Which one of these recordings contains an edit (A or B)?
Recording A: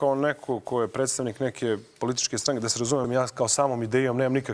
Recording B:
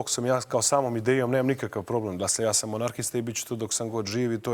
A